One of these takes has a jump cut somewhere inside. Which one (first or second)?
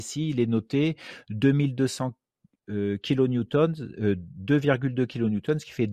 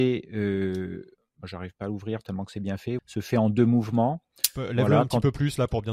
second